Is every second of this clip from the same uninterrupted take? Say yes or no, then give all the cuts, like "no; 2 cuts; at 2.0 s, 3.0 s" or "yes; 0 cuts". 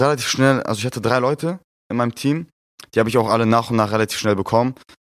yes; 0 cuts